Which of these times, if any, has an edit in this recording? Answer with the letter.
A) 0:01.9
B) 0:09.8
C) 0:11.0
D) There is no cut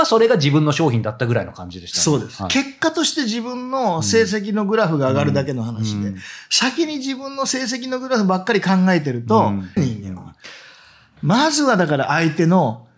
B